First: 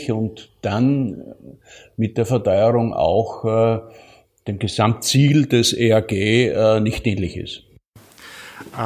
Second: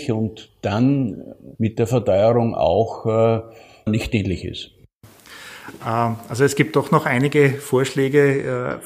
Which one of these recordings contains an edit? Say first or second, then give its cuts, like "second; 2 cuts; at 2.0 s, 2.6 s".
second; 2 cuts; at 1.5 s, 3.9 s